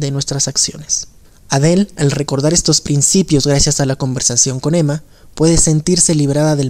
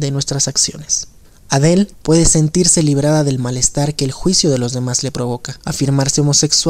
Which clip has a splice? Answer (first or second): second